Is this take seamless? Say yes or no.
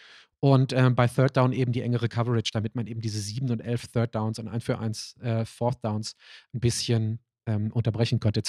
yes